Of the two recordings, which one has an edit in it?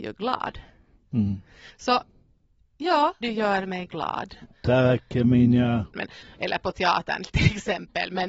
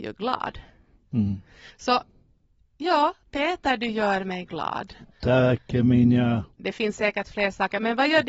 first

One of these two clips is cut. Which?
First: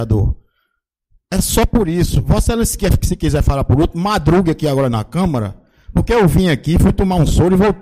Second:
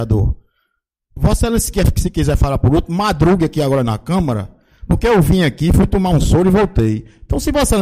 second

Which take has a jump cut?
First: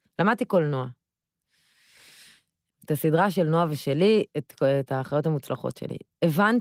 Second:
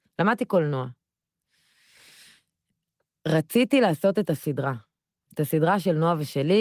first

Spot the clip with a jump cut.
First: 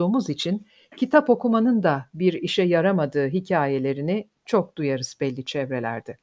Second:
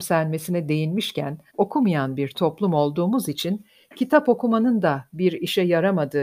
second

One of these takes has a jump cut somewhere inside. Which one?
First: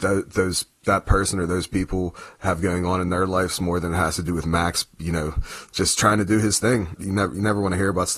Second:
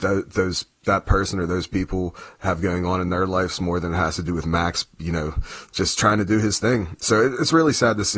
first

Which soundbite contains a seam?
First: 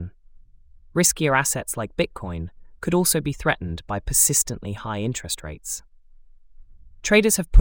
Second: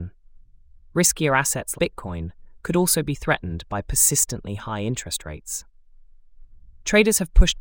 second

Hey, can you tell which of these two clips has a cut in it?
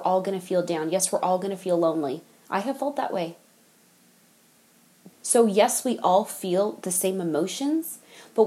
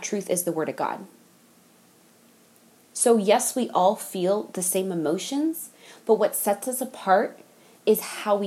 first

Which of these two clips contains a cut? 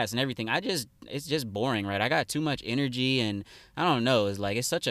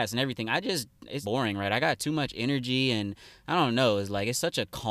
second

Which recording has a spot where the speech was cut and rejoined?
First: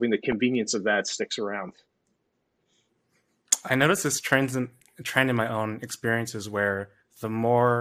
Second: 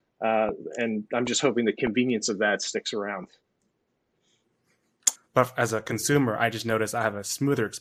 second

